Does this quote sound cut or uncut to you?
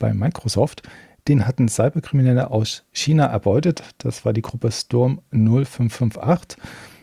uncut